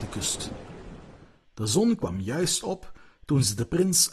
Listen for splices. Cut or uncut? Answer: uncut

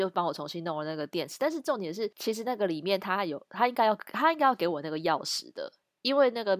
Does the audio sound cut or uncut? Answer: cut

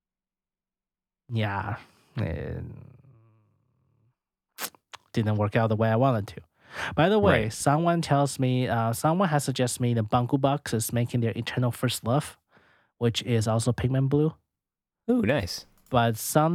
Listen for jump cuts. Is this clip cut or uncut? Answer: uncut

